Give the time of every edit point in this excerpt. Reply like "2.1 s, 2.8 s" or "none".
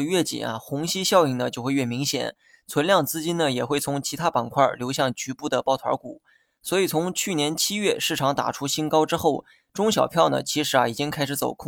none